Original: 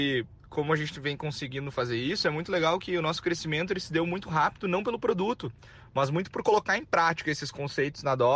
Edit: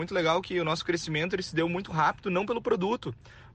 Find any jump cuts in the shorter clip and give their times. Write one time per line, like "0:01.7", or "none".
none